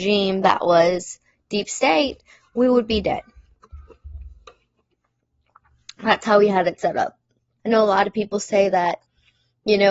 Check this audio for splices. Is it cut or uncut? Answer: cut